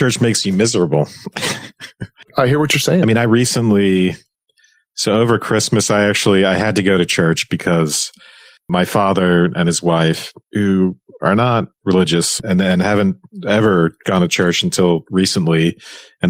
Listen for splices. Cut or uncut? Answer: uncut